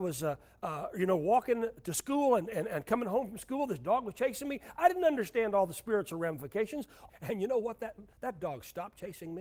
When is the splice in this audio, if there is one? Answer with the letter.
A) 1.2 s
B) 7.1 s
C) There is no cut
B